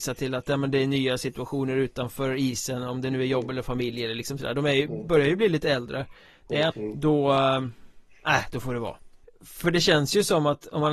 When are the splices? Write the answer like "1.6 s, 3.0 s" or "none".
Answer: 6.7 s, 9.2 s